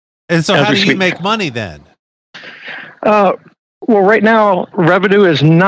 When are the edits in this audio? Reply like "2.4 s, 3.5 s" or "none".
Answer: 4.7 s